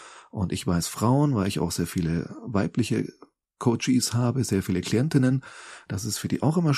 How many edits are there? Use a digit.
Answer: 0